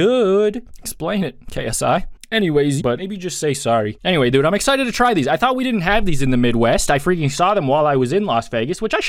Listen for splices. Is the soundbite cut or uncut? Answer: cut